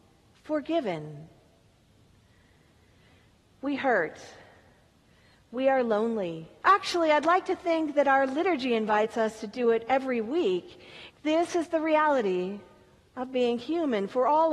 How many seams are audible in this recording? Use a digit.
2